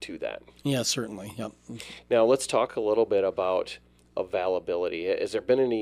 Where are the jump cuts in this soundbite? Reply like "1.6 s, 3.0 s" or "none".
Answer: none